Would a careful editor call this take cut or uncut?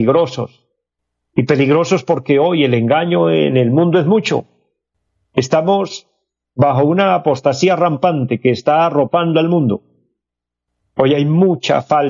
uncut